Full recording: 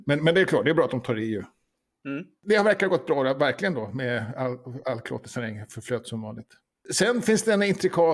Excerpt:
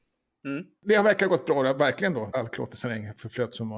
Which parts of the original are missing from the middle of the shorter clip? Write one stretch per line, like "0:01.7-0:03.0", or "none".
0:03.9-0:04.8